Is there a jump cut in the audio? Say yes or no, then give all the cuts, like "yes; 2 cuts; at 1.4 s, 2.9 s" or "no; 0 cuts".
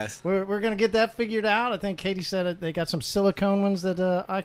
no; 0 cuts